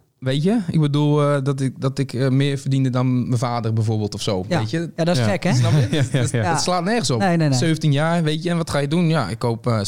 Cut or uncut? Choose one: uncut